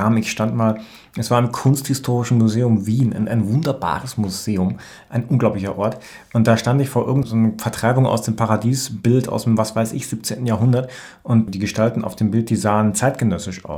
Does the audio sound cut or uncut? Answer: uncut